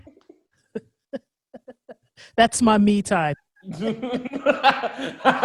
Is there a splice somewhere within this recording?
yes; 1 cut; at 3.3 s

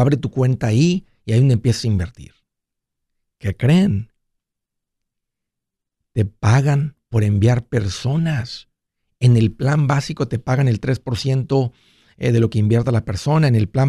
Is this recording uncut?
yes; 0 cuts

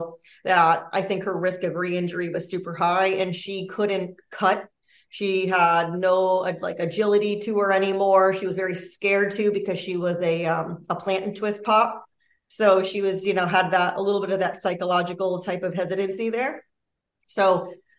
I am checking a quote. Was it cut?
no; 0 cuts

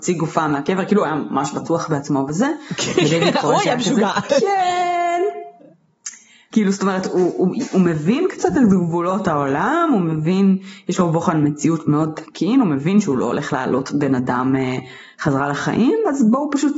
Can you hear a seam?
yes; 1 cut; at 6.5 s

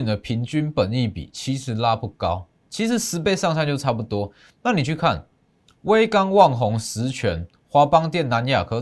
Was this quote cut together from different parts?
no; 0 cuts

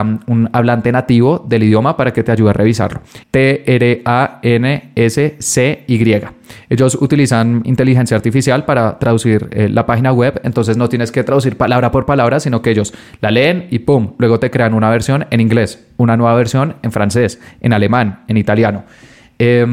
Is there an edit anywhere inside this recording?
yes; 1 cut; at 3.2 s

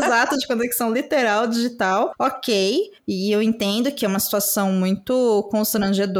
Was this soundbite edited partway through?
no; 0 cuts

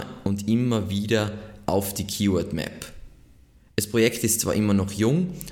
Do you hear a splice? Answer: no; 0 cuts

